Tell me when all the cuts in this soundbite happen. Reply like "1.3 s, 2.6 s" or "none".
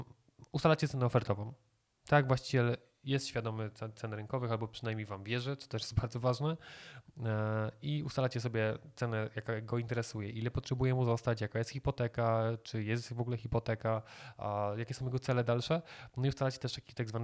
none